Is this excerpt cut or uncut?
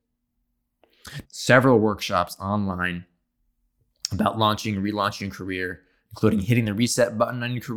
cut